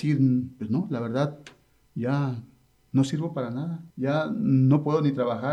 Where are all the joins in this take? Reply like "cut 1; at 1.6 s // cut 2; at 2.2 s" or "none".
cut 1; at 3.9 s